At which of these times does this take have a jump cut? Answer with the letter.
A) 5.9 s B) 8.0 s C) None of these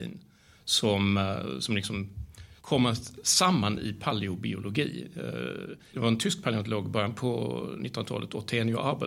A